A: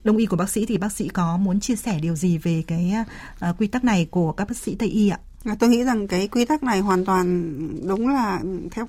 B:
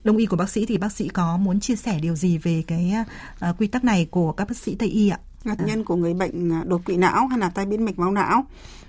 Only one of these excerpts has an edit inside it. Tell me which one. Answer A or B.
B